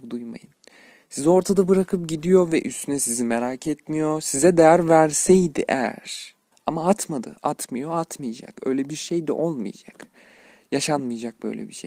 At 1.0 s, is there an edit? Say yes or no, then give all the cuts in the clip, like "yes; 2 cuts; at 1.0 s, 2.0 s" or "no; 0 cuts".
no; 1 cut; at 6.5 s